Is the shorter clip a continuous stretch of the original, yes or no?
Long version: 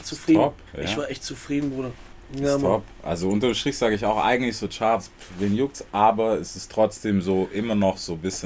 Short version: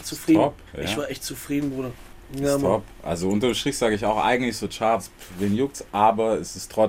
yes